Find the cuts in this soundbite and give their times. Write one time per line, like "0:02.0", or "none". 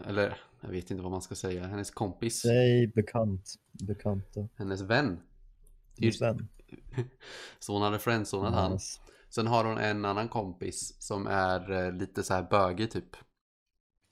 0:06.9